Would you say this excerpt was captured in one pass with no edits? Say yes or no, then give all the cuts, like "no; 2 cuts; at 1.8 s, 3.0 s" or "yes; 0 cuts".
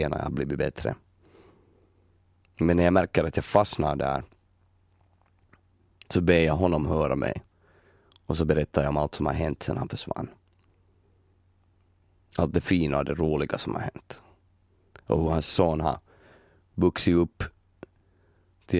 no; 1 cut; at 2.5 s